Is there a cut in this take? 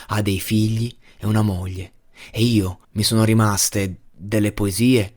yes; 1 cut; at 2.8 s

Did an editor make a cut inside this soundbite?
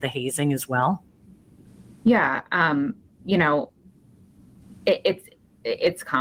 no; 0 cuts

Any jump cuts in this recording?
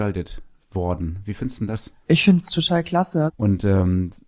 yes; 2 cuts; at 2.0 s, 3.3 s

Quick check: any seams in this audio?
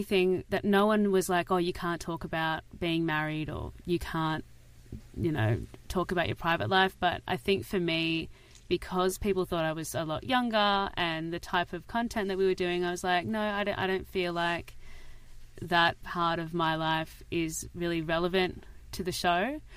no; 0 cuts

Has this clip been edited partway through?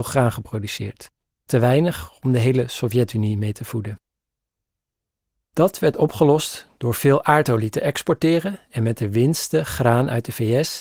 no; 0 cuts

